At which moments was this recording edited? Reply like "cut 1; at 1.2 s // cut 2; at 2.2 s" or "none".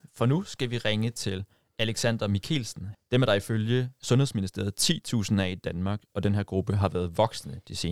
cut 1; at 2.9 s